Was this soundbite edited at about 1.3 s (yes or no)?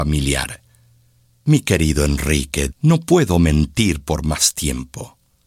no